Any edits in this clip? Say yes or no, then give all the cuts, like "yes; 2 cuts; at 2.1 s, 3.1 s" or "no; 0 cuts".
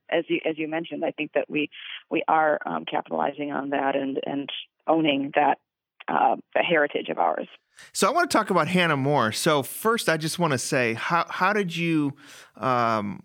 no; 0 cuts